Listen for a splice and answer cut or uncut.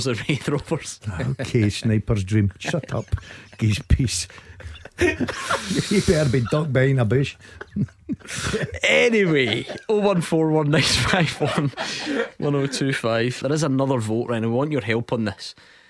cut